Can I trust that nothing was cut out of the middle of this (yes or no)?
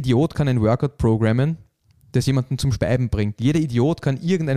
yes